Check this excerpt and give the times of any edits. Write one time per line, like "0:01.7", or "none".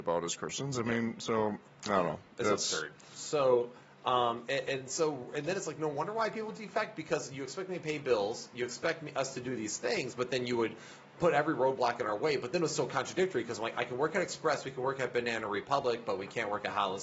none